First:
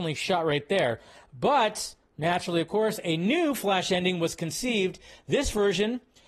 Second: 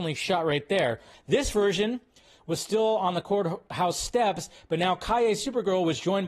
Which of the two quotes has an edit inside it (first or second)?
second